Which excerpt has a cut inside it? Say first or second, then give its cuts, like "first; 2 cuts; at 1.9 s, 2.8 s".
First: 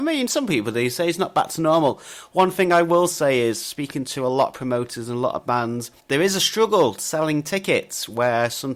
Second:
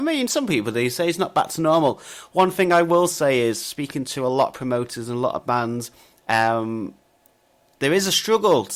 first; 1 cut; at 6.0 s